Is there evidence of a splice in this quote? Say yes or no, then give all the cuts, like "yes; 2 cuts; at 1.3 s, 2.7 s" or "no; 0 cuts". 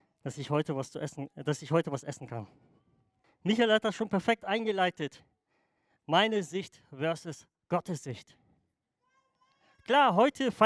yes; 1 cut; at 3.2 s